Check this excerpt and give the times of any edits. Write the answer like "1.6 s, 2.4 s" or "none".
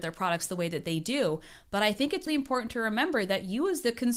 2.3 s